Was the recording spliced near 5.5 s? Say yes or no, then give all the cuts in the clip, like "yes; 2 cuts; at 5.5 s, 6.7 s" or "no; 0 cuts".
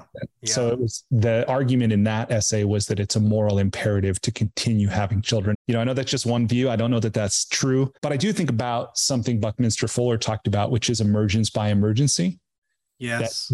yes; 2 cuts; at 5.5 s, 8.0 s